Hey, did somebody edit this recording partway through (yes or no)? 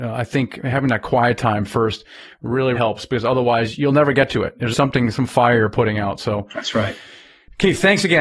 yes